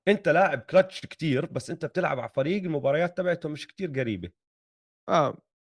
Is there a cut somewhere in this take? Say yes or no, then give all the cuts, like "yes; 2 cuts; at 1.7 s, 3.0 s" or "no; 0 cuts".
no; 0 cuts